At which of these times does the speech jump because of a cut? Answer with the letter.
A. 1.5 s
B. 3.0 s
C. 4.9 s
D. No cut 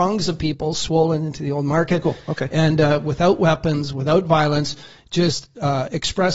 D